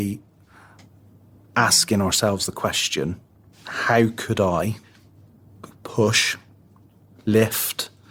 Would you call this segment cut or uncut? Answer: cut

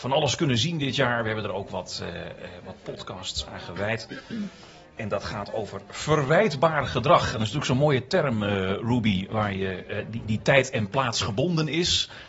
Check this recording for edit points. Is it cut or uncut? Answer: uncut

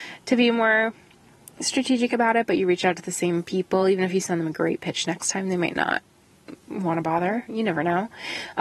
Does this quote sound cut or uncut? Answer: uncut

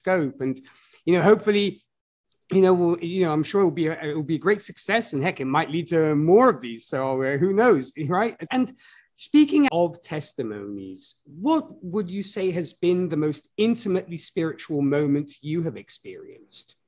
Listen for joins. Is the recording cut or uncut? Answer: cut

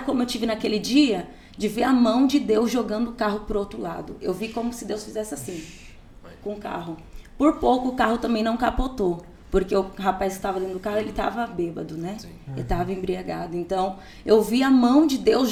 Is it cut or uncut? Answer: uncut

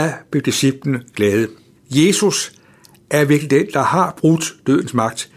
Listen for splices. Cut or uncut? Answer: cut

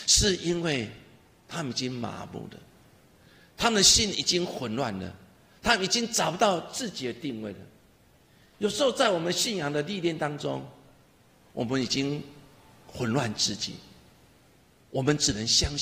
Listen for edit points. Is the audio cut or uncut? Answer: uncut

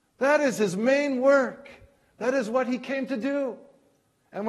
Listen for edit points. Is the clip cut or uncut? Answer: uncut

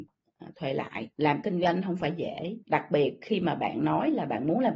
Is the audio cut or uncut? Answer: cut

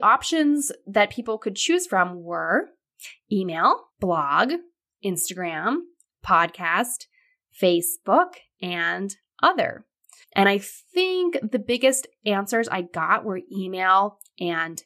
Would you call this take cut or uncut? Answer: cut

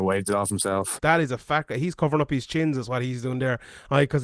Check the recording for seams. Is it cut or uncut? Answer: cut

